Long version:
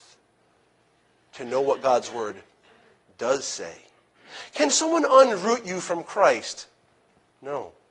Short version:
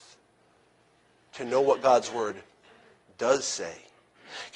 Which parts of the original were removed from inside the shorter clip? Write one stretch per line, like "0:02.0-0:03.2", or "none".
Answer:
none